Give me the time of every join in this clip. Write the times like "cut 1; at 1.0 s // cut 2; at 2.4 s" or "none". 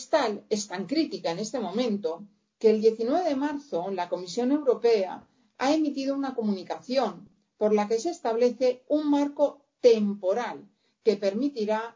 none

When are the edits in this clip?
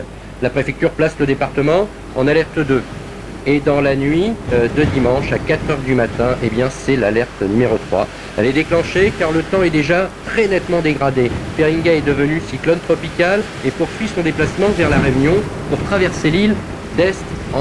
none

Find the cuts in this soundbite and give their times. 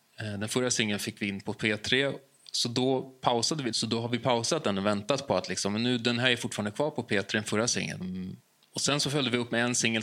cut 1; at 3.7 s // cut 2; at 8.0 s

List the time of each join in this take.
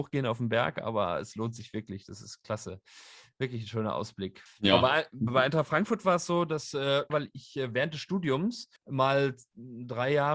cut 1; at 4.5 s // cut 2; at 7.1 s // cut 3; at 8.8 s

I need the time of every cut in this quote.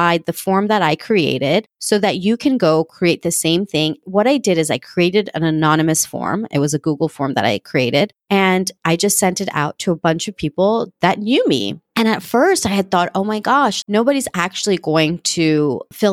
none

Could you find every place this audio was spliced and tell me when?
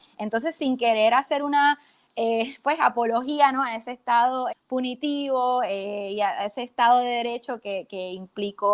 cut 1; at 4.5 s

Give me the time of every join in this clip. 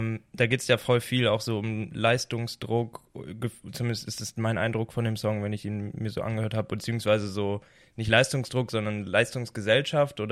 none

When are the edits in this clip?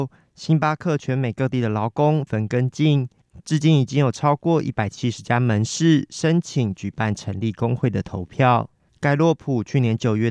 cut 1; at 2.3 s // cut 2; at 8.9 s

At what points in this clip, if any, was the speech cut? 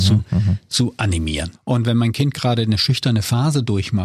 cut 1; at 1.5 s

